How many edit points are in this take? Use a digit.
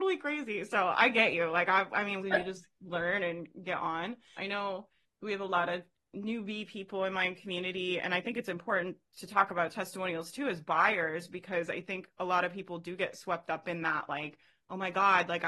2